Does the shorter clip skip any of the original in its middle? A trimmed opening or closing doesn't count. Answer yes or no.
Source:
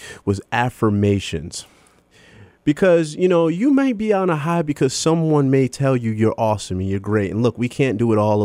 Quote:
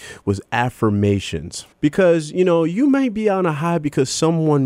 yes